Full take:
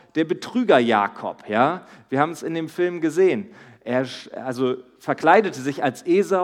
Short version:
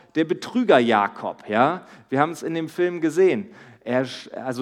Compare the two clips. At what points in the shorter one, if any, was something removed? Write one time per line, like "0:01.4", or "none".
none

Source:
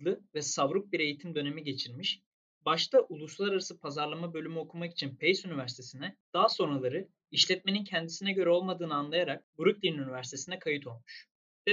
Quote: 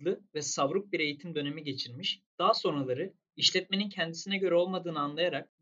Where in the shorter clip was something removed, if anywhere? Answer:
0:02.3

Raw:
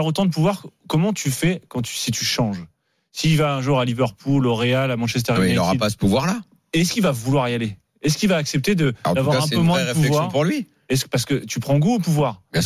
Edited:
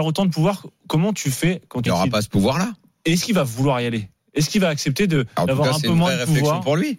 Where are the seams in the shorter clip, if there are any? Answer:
0:01.9

